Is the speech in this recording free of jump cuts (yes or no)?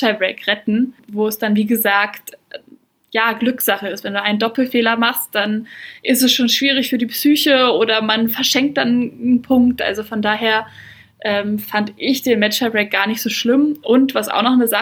yes